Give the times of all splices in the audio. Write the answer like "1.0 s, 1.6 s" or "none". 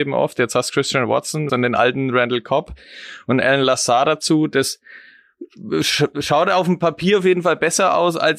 1.5 s

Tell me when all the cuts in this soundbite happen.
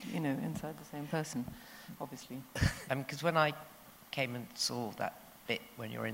2.8 s

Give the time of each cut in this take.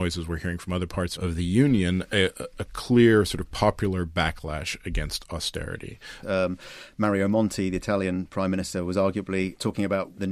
6.2 s

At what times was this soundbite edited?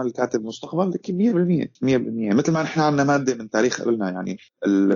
1.8 s

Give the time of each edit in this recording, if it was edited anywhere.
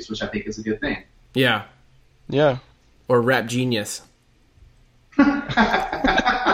none

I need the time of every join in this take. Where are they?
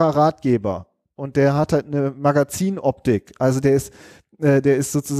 none

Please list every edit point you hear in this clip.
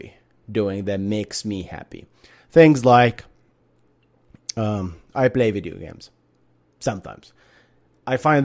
none

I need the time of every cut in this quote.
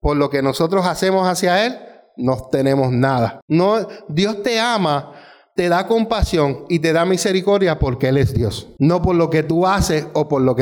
3.4 s

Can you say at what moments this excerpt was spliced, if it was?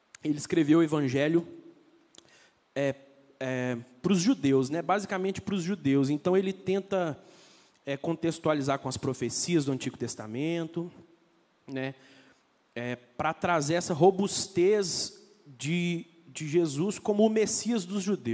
none

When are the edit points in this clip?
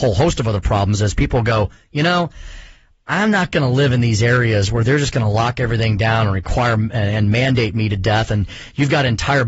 none

